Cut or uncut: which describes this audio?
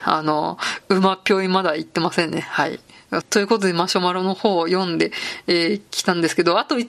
cut